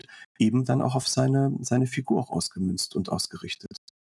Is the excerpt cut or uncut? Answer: uncut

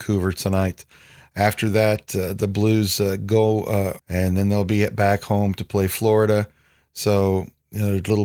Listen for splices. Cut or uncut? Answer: cut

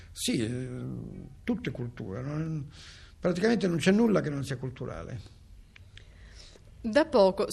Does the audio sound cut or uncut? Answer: uncut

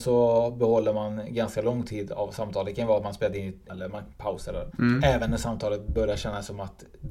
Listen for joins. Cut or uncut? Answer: cut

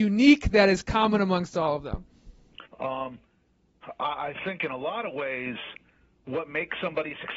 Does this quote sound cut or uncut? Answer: cut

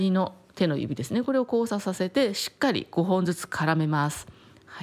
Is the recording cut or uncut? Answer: uncut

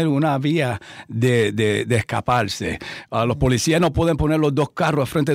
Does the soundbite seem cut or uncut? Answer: uncut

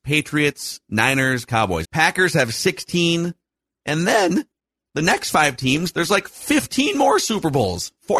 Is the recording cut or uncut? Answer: cut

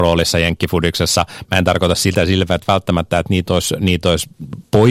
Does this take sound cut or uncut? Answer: uncut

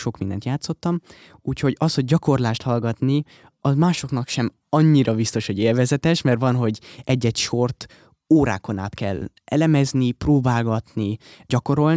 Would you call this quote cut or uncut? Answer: uncut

